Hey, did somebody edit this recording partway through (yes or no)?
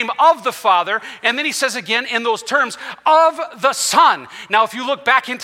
no